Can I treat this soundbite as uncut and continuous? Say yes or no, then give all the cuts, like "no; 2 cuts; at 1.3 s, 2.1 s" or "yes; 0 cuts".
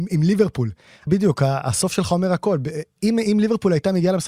no; 1 cut; at 1.1 s